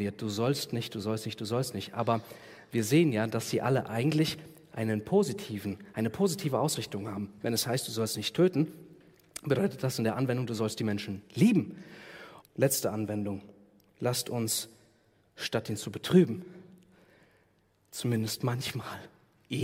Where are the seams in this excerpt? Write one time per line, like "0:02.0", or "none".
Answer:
0:12.4